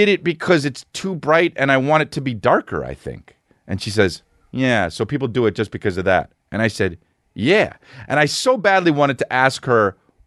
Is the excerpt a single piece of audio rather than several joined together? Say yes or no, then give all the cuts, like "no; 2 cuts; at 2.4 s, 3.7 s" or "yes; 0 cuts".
yes; 0 cuts